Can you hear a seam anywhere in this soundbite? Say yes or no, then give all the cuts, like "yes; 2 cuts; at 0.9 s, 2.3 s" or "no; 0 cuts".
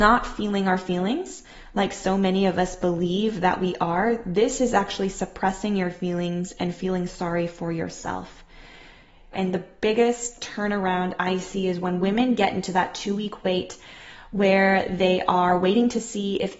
yes; 1 cut; at 9.3 s